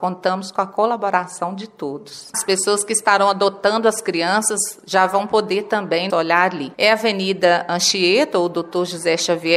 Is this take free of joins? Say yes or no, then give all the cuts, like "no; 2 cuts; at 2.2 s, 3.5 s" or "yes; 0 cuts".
no; 2 cuts; at 2.3 s, 6.1 s